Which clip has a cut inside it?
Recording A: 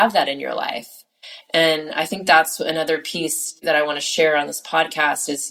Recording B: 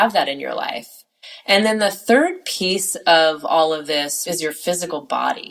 A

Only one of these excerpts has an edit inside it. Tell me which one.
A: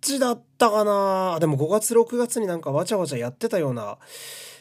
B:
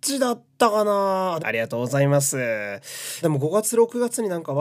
B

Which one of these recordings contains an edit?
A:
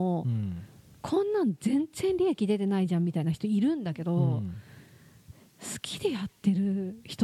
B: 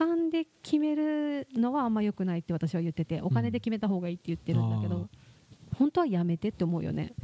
B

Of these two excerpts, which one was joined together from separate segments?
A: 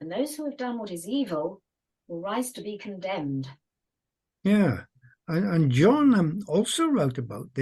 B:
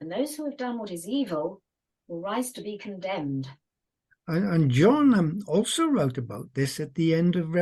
B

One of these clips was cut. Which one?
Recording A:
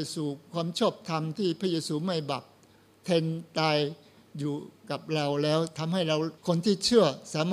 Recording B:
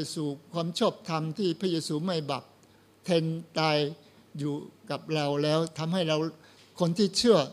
A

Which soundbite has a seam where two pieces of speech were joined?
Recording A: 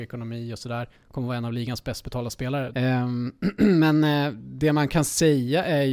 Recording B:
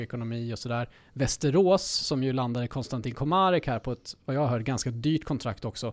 A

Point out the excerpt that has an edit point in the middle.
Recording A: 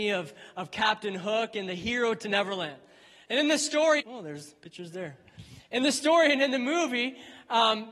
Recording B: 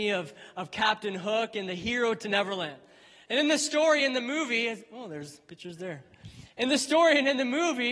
A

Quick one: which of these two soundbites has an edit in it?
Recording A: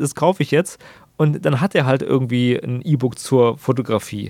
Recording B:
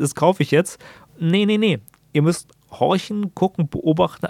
B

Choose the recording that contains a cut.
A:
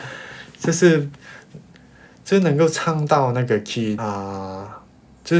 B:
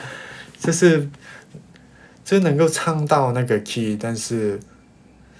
A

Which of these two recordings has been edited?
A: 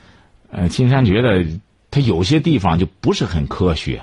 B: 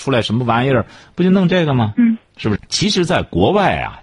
B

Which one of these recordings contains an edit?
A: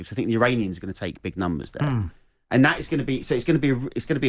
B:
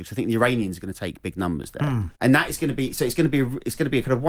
B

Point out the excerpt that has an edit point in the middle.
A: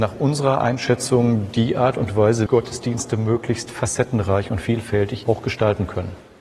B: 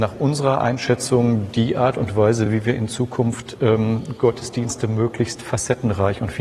A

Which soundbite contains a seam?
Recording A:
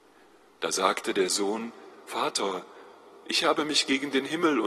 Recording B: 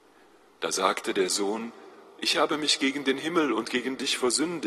B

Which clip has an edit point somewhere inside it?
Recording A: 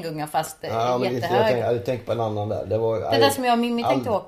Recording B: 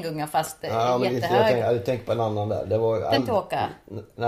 B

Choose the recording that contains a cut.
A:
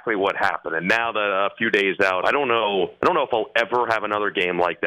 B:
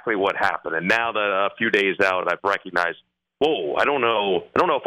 A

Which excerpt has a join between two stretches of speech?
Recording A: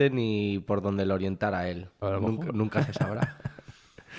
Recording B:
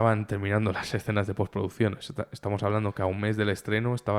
A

